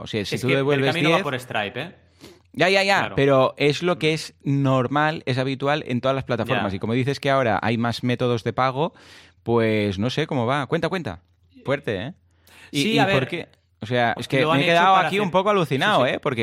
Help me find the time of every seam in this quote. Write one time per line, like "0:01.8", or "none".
0:11.7
0:14.2